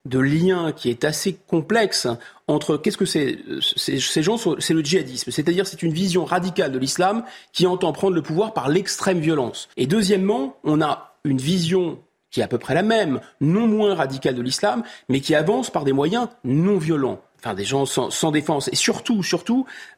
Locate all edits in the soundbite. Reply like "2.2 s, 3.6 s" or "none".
9.7 s, 17.3 s